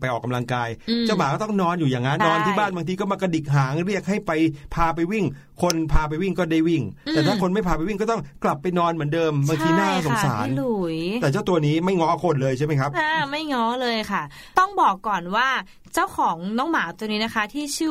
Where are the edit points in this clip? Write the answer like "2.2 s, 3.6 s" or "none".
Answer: 2.2 s